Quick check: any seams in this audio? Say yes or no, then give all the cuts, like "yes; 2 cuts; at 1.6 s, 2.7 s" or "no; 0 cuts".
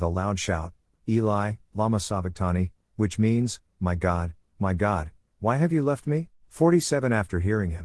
yes; 1 cut; at 0.9 s